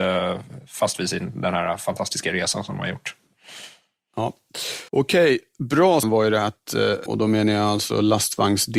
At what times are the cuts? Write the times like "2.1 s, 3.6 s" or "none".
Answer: 4.9 s, 6.0 s, 7.1 s